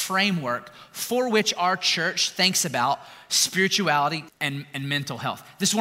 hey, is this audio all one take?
no; 1 cut; at 4.3 s

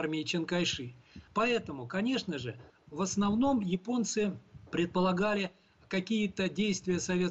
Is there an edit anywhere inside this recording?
yes; 1 cut; at 1.3 s

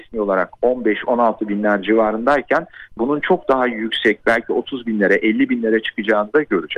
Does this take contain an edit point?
yes; 1 cut; at 3.0 s

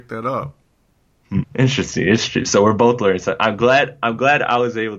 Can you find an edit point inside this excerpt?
yes; 1 cut; at 1.4 s

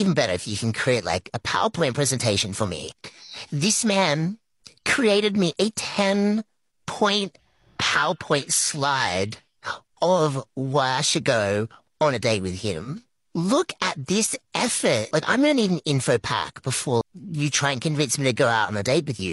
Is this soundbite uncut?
no; 2 cuts; at 15.1 s, 17.0 s

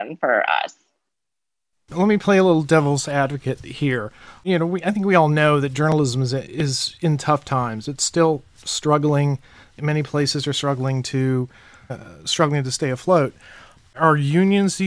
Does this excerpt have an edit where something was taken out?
yes; 1 cut; at 11.9 s

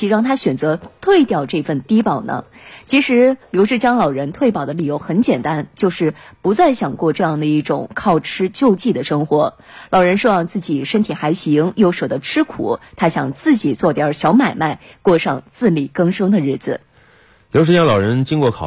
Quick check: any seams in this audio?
no; 0 cuts

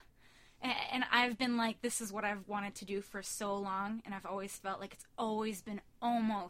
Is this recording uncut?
yes; 0 cuts

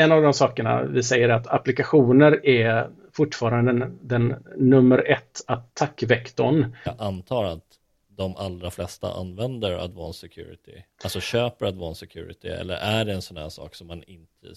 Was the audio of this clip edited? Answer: yes; 2 cuts; at 6.9 s, 10.9 s

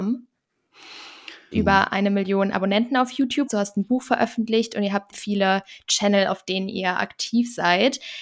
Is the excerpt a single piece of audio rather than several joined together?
no; 3 cuts; at 1.5 s, 3.5 s, 5.1 s

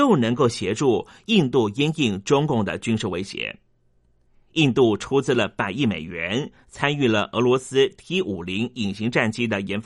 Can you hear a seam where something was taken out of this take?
no; 0 cuts

